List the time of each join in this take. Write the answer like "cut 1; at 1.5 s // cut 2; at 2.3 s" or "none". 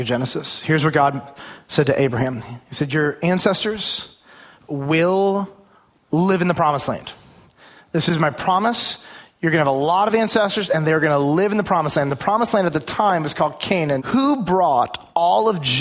cut 1; at 14.0 s